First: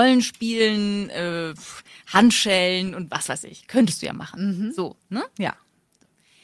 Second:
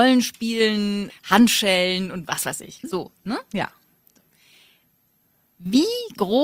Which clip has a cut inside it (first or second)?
second